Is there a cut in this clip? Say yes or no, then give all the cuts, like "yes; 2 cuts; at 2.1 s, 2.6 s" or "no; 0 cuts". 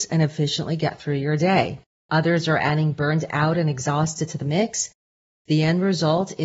yes; 1 cut; at 2.1 s